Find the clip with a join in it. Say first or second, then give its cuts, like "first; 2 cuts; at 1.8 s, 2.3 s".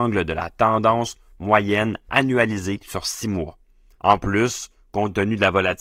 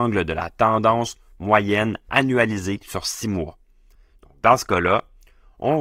first; 1 cut; at 3.9 s